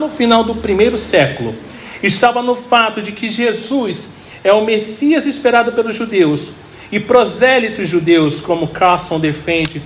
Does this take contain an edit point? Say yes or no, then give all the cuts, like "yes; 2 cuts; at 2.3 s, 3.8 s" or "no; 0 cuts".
no; 0 cuts